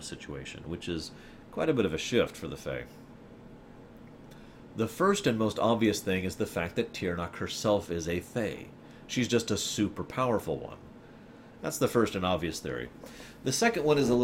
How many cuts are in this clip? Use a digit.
1